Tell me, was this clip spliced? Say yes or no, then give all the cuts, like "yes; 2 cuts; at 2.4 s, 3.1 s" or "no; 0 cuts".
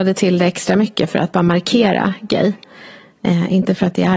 no; 0 cuts